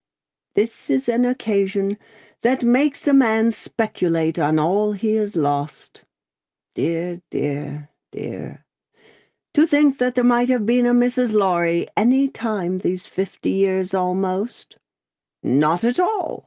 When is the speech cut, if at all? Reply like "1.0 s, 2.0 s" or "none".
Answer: none

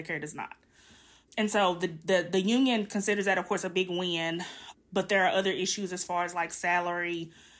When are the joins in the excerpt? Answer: none

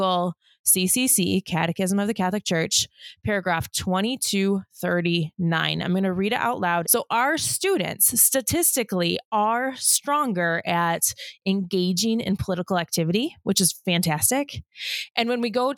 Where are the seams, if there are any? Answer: 6.8 s

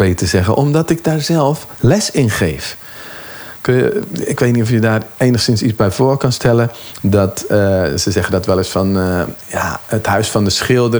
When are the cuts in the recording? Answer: none

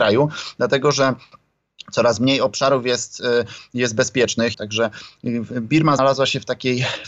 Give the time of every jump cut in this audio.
4.5 s, 6.0 s

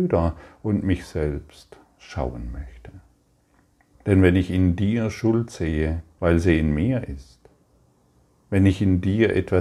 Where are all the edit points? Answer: 3.9 s, 6.2 s

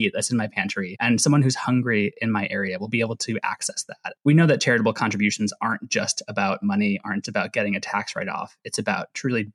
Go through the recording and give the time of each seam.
7.2 s

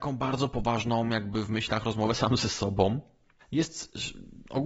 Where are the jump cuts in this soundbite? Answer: 3.4 s

